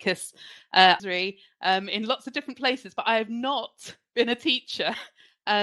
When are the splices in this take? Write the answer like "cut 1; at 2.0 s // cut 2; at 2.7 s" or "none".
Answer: cut 1; at 1.0 s